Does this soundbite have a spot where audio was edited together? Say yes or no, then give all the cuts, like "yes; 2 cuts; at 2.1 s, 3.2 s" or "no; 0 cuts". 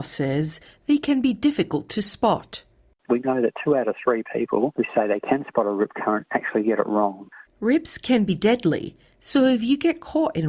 yes; 1 cut; at 7.5 s